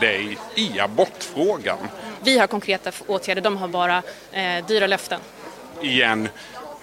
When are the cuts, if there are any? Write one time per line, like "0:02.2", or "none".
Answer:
0:02.2